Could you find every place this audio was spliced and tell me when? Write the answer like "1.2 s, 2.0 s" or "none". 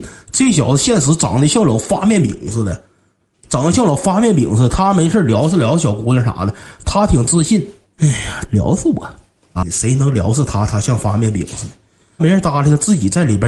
8.5 s, 9.6 s